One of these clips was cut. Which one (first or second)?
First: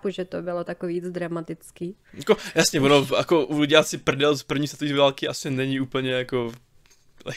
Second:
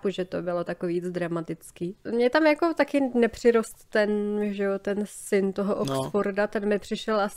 second